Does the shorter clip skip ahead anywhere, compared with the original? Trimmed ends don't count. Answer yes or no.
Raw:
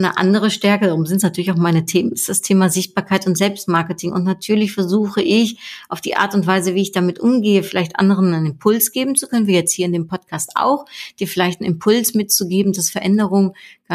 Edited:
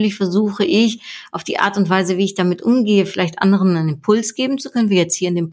no